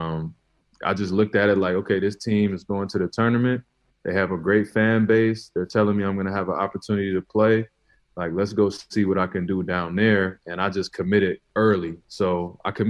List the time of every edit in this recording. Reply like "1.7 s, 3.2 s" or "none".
none